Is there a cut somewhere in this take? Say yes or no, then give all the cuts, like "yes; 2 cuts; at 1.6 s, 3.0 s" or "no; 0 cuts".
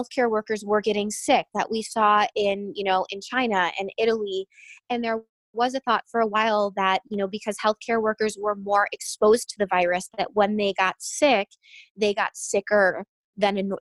no; 0 cuts